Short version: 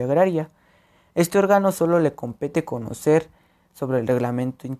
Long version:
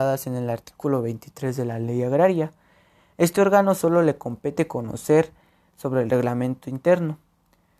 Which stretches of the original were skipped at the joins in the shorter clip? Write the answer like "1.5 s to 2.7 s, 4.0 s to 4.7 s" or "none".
none